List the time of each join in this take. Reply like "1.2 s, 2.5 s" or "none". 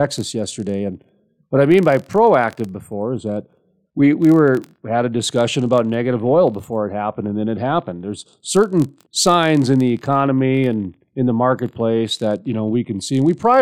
9.0 s